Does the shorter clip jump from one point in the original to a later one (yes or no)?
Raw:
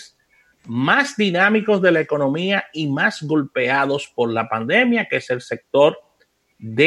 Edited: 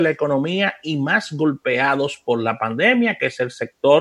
no